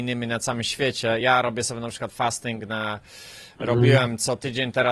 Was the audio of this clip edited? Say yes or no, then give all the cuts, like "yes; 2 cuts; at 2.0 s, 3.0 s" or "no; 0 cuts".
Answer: no; 0 cuts